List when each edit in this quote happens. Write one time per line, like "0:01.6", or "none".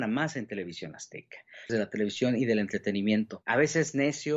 0:01.7